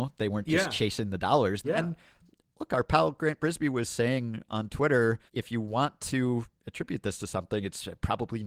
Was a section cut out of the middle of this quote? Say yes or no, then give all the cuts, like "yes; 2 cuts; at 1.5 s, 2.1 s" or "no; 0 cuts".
yes; 2 cuts; at 1.6 s, 5.3 s